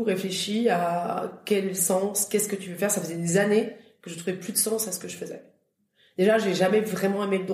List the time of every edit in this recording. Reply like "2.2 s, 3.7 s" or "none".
none